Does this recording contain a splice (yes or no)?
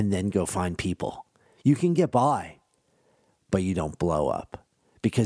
yes